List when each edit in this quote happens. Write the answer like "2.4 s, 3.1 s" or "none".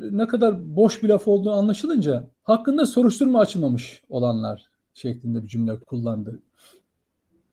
2.3 s, 5.8 s